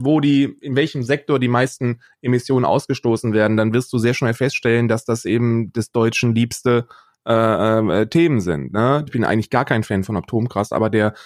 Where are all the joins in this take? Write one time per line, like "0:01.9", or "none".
0:09.1